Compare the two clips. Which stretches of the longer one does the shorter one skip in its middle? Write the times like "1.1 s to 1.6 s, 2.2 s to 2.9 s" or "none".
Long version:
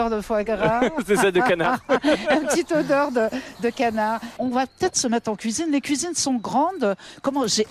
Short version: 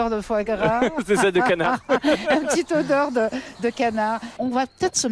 none